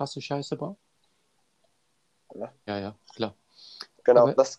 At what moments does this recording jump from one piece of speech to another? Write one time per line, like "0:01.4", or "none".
0:02.7